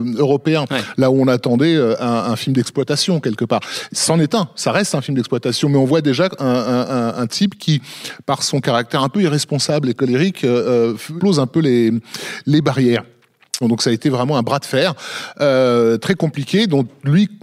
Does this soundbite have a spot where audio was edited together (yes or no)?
yes